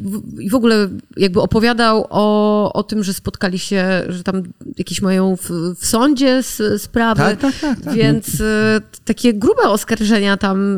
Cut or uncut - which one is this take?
uncut